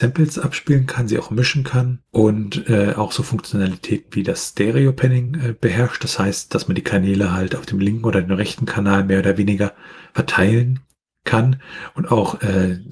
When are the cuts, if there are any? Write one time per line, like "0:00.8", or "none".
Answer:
none